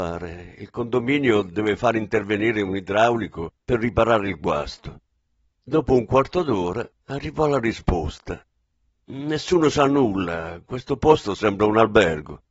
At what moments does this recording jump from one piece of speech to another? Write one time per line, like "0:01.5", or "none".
none